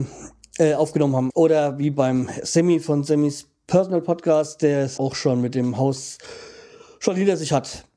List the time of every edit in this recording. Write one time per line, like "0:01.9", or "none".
0:01.3
0:05.0